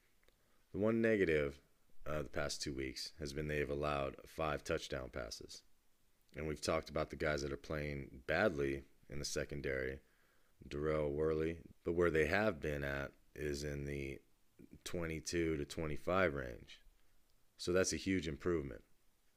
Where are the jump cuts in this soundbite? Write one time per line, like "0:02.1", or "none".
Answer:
0:10.5
0:11.7